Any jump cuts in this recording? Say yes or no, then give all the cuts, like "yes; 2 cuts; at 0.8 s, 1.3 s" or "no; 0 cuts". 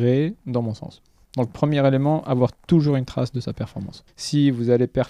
yes; 1 cut; at 4.1 s